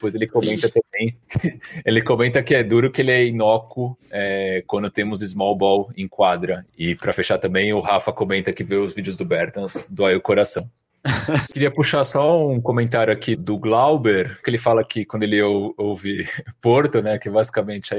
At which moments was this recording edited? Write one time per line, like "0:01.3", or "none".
0:06.7
0:11.4
0:14.4